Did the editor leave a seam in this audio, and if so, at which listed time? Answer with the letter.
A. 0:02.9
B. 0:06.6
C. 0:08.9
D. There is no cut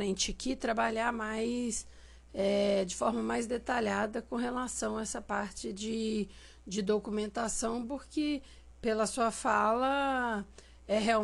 D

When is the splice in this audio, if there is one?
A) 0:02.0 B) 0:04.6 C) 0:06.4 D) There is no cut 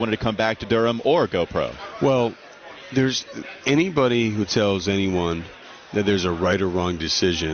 D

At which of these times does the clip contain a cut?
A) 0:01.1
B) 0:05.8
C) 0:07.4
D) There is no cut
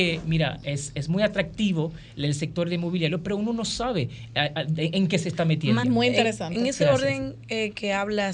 B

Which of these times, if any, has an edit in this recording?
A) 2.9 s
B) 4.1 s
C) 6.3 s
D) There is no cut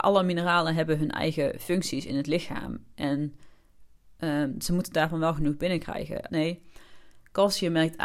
C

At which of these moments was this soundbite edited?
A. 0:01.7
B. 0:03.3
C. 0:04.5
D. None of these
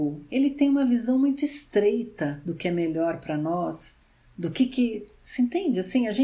D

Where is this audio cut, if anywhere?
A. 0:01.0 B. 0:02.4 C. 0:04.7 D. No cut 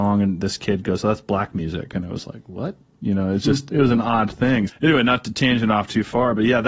C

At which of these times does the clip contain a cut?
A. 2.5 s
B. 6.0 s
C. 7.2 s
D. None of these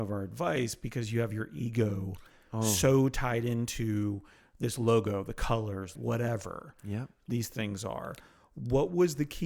B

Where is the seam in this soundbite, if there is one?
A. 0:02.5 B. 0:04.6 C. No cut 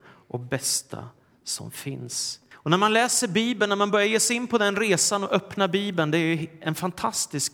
A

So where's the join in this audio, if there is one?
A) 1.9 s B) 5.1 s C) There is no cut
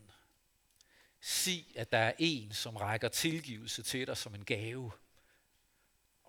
C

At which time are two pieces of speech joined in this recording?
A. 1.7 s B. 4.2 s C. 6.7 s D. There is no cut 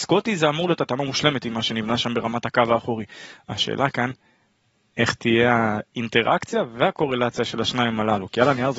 D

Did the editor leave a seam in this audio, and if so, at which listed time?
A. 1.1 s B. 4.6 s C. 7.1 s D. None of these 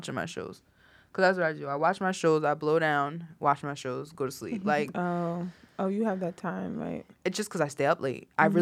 C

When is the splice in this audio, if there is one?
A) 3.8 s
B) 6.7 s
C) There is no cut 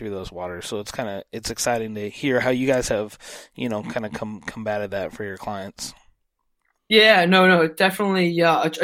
C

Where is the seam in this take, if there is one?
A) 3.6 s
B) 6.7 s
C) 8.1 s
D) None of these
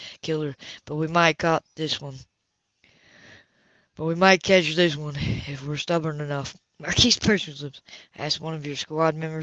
D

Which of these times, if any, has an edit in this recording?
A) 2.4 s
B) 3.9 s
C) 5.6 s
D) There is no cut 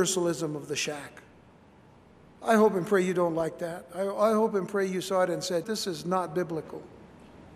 C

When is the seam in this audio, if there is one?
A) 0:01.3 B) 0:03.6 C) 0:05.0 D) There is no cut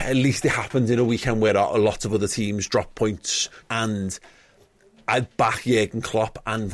B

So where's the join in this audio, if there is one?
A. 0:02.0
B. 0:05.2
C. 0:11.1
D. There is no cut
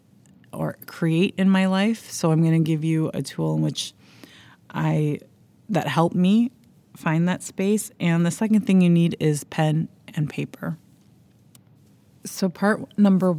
D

